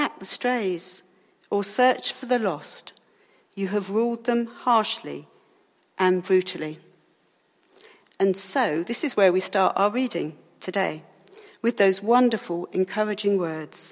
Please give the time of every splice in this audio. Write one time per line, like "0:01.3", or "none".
none